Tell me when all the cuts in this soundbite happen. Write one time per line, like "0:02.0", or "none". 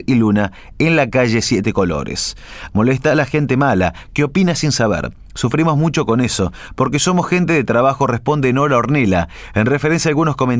0:02.7